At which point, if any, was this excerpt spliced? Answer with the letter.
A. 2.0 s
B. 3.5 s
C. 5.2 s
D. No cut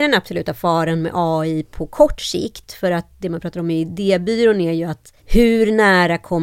C